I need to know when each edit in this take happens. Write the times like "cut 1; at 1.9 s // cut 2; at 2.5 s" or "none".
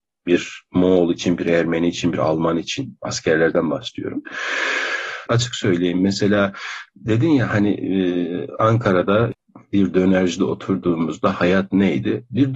cut 1; at 5.3 s